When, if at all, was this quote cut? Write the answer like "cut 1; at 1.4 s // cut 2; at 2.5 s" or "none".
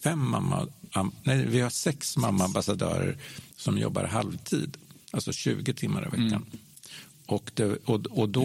none